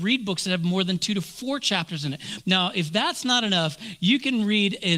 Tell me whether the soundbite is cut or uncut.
cut